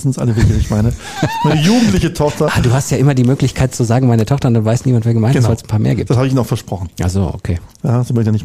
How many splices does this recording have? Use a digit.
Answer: 0